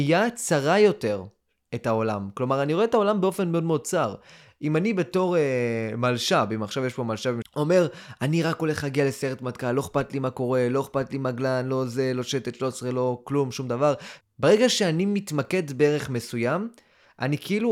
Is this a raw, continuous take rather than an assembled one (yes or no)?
no